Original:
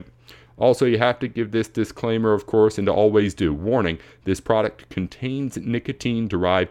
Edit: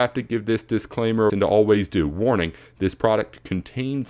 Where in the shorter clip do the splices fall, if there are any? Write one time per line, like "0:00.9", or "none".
0:01.3